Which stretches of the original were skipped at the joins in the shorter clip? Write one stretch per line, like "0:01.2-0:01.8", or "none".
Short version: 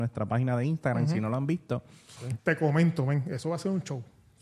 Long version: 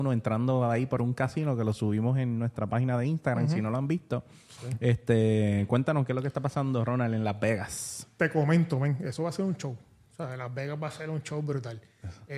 0:04.8-0:08.1